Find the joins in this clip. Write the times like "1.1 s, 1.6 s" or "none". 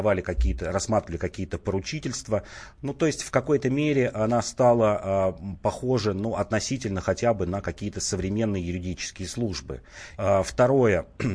10.2 s